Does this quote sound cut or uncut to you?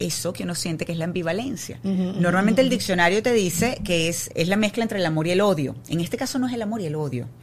cut